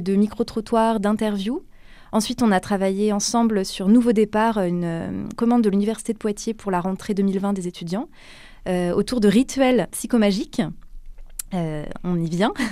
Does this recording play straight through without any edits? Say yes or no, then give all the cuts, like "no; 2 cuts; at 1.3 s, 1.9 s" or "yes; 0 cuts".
yes; 0 cuts